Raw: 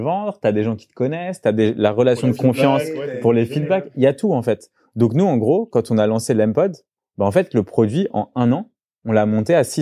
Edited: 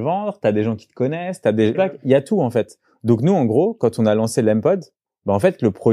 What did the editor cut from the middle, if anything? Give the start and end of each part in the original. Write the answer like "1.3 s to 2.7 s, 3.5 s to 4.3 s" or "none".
1.7 s to 3.7 s